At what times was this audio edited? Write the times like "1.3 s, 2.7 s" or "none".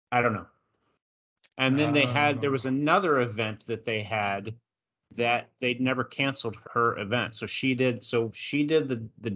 1.5 s, 6.6 s